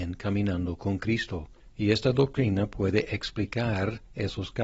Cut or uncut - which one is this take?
uncut